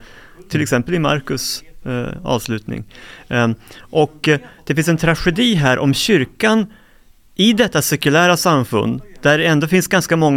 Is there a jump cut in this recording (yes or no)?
no